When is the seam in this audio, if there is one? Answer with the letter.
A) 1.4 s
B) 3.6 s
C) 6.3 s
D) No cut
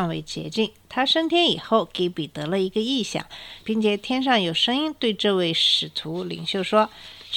B